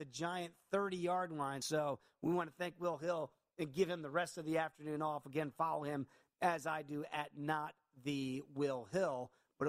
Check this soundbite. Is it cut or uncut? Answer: uncut